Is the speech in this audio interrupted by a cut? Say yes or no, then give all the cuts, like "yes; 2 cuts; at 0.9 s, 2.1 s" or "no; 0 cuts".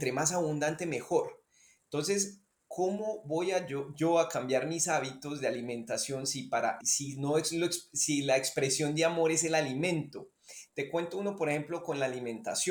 yes; 2 cuts; at 6.8 s, 10.7 s